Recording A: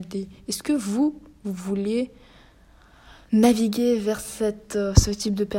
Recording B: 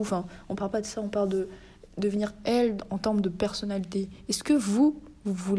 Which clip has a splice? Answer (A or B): A